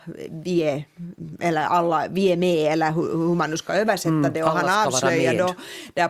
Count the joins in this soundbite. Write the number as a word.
zero